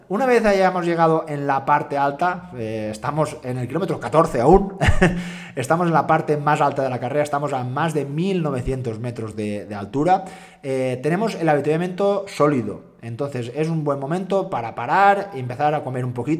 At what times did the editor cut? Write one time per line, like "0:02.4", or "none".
none